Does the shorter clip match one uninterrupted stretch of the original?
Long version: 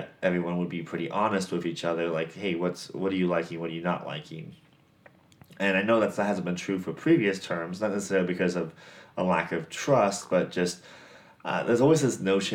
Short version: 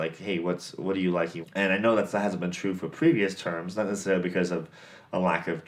no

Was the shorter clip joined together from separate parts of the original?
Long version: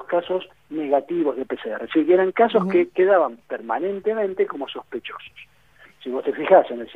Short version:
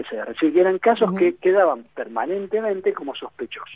no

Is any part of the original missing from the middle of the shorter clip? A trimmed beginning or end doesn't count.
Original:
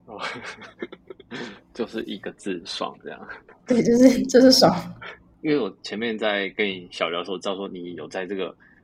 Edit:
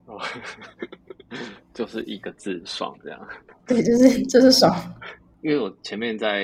no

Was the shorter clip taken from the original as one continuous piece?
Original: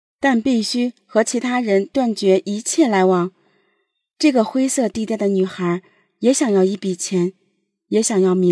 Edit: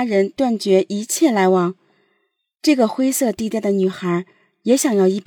yes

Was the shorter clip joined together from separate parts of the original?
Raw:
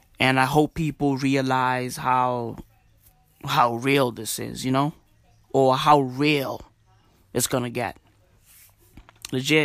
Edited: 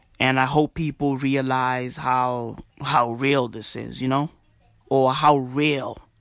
yes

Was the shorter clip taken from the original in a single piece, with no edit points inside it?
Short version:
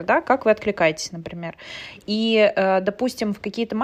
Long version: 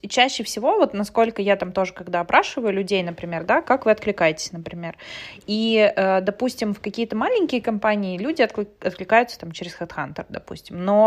yes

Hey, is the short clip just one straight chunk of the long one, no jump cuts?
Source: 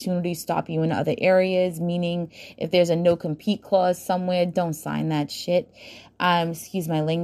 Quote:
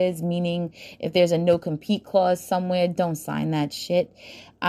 yes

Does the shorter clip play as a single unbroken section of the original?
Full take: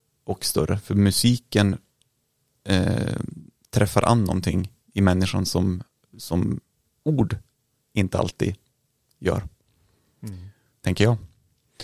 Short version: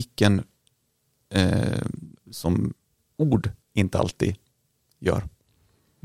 no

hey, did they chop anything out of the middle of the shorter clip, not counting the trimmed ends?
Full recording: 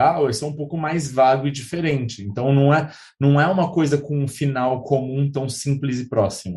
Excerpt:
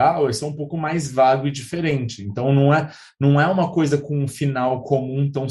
no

